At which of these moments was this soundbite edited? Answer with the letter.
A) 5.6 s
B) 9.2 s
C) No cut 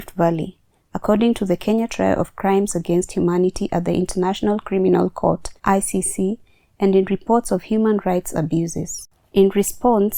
A